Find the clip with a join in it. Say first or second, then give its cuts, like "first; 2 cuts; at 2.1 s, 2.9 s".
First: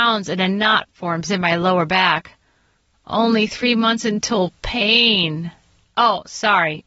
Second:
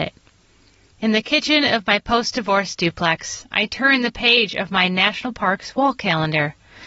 second; 1 cut; at 0.9 s